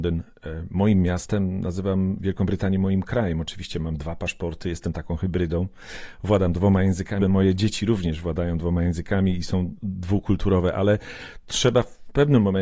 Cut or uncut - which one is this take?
cut